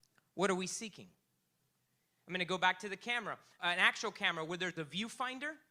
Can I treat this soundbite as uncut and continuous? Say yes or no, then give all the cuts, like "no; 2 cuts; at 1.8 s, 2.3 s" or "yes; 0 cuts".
no; 1 cut; at 3.6 s